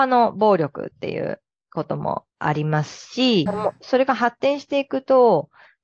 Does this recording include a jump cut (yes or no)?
yes